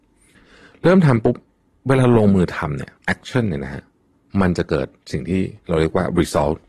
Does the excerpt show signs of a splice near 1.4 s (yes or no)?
no